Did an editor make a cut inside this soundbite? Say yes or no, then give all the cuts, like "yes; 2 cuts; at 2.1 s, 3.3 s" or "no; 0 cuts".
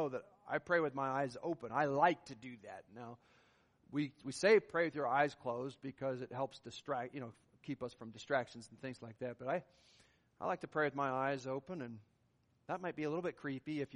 no; 0 cuts